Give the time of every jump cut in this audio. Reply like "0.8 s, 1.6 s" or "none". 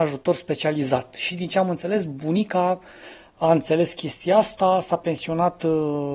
none